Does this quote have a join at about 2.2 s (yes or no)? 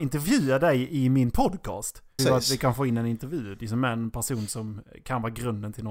yes